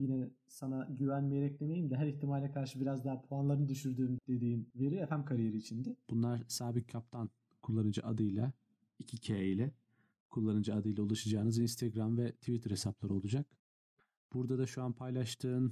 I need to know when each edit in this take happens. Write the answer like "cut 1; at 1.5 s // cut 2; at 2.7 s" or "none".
cut 1; at 6.0 s